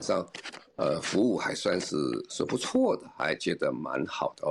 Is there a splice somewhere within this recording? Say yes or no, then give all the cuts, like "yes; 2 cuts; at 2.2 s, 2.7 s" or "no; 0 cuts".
no; 0 cuts